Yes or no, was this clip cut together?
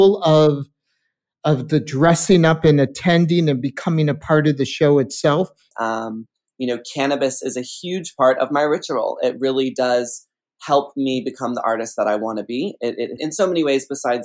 yes